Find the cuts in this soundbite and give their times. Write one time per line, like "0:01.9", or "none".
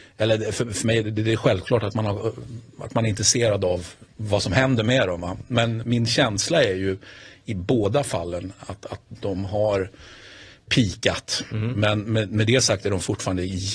0:05.8